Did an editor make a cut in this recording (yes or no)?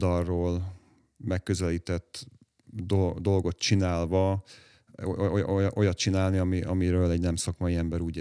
no